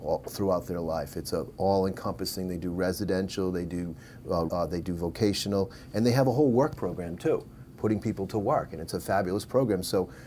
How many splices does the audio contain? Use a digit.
1